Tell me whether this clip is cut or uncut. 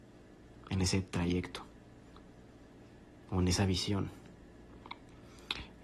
uncut